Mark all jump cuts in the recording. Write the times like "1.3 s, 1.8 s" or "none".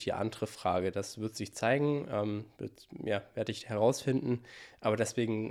none